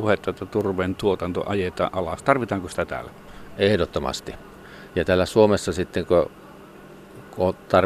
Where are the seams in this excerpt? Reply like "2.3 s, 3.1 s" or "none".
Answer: 4.9 s